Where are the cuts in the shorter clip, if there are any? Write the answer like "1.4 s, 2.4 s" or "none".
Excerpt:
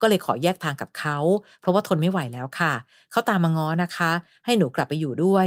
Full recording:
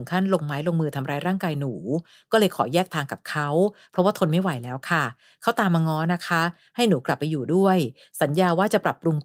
none

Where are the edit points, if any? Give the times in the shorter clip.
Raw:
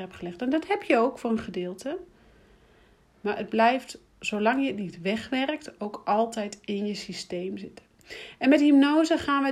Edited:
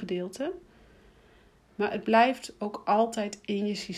2.6 s

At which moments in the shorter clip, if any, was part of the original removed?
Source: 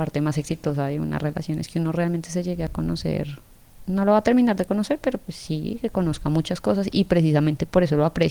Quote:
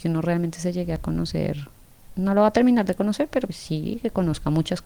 3.5 s

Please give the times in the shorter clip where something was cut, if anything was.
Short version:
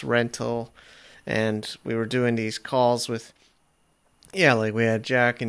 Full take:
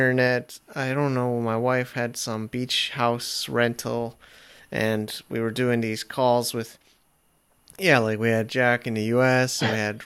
none

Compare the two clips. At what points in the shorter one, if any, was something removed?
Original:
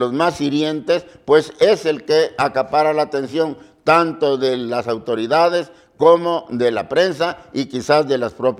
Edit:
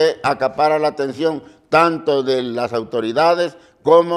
none

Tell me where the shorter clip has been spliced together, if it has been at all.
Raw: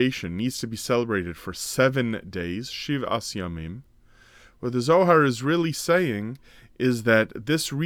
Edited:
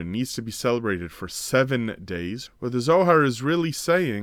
2.4 s

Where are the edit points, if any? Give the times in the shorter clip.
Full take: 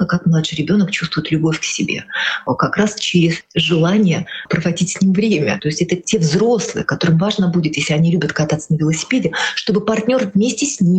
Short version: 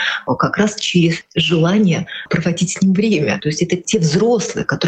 none

